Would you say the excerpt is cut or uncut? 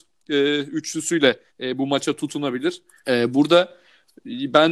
cut